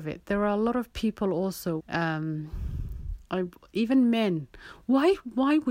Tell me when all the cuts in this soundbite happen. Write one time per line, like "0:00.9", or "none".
0:01.8